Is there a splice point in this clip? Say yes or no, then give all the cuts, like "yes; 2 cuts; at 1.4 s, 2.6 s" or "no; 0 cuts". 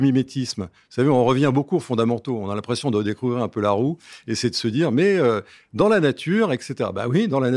no; 0 cuts